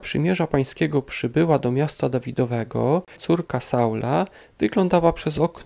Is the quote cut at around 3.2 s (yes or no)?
yes